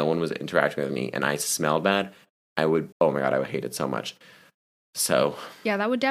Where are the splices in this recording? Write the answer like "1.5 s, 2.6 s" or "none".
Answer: 2.9 s

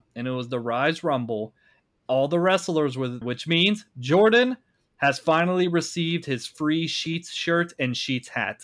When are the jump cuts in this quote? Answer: 3.2 s

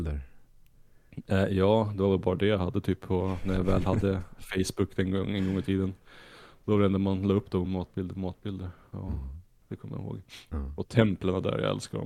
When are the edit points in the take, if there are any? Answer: 7.6 s

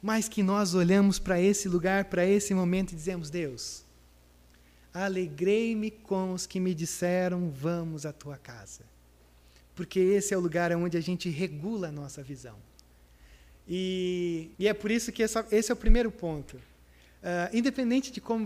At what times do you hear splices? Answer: 14.5 s

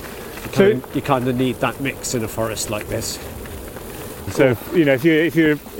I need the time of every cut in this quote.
4.3 s

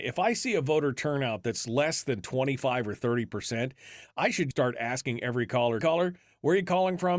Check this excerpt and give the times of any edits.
4.5 s, 5.8 s

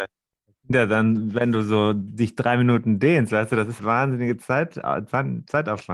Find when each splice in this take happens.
3.8 s

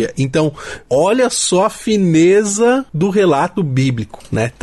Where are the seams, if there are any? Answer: none

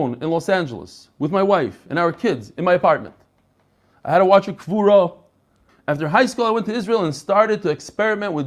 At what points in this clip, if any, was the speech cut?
5.7 s

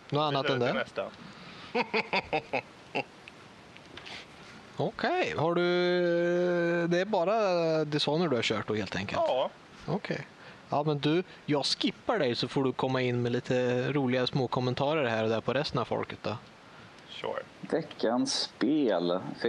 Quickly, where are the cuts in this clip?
17.6 s

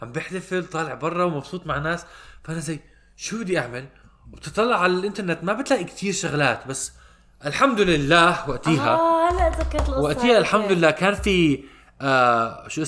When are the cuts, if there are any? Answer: none

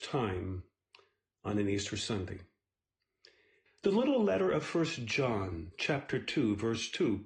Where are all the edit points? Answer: 3.7 s

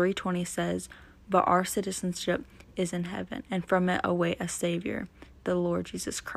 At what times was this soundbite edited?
3.5 s

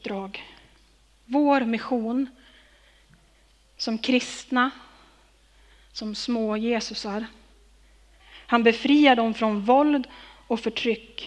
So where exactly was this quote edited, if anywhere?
8.2 s

